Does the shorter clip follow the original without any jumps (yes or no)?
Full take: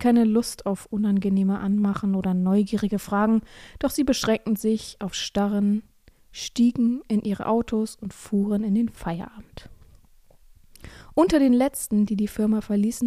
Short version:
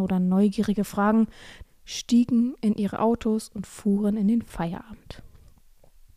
no